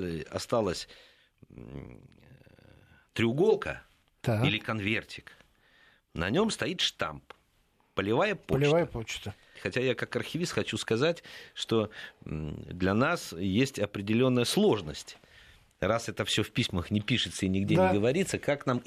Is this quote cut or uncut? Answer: cut